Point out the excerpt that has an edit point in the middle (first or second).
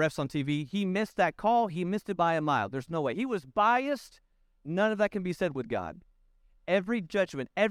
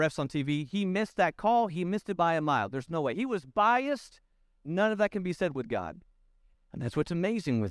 second